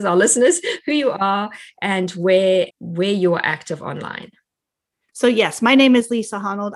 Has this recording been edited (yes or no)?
yes